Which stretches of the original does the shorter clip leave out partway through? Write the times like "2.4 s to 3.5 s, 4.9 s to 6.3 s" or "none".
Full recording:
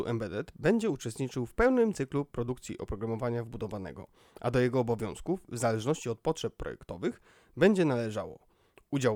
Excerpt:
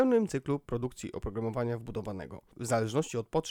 4.2 s to 5.4 s